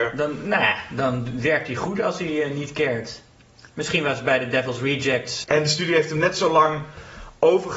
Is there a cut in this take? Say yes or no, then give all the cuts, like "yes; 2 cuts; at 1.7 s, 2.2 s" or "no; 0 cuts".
yes; 1 cut; at 5.4 s